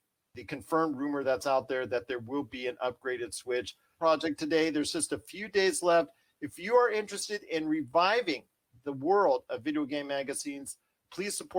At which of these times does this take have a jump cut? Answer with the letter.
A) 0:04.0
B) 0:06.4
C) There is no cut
A